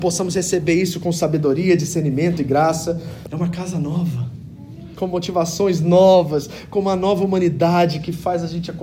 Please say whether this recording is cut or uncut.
cut